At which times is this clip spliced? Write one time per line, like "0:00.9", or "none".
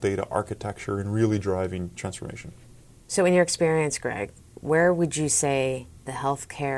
none

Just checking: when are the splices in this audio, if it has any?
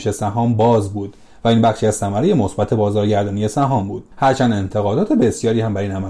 0:04.1

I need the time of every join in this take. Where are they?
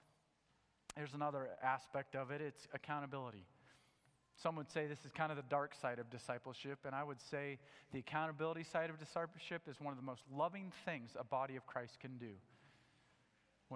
none

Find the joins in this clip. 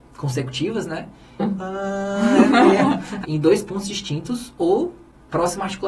0:01.4
0:03.2

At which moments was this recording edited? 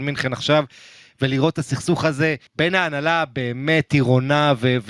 0:02.5

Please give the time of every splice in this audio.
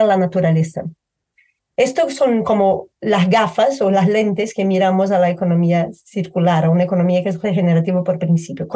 none

